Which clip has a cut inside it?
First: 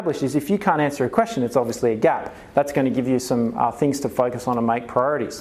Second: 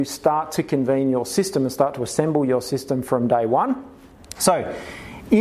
second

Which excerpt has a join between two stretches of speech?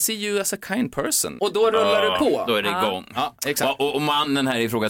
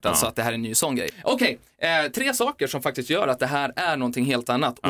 first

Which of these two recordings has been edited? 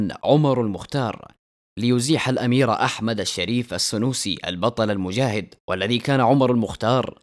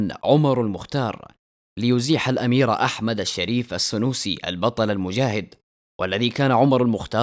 first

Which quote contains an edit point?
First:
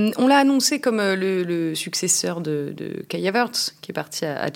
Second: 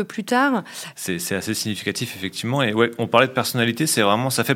second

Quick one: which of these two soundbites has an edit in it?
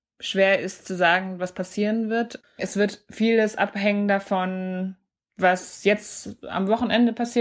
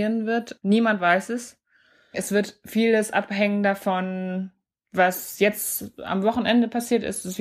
first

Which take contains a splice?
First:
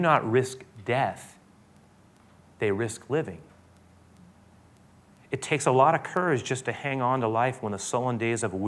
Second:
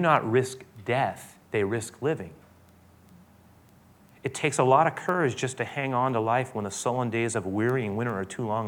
second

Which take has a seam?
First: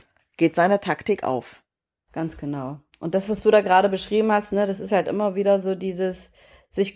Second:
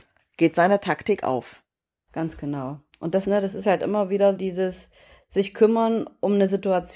second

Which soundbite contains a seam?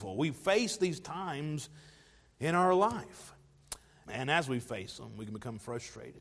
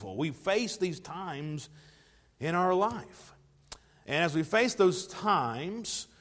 first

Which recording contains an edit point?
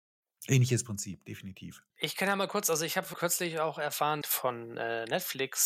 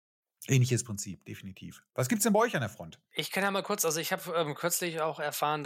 first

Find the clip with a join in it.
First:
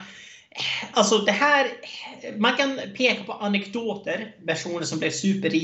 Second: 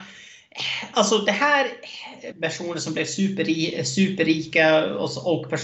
second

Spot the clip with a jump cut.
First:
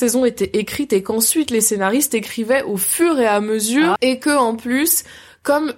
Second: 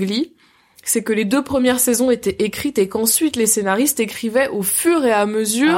first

